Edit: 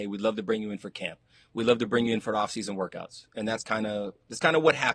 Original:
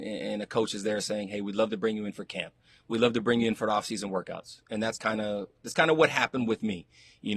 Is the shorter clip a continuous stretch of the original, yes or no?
yes